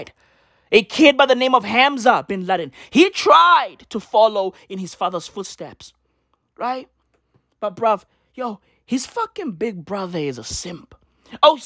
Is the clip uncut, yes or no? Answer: yes